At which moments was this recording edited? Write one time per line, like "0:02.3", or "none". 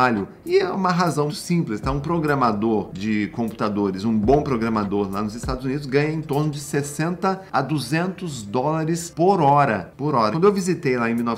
0:01.3
0:10.3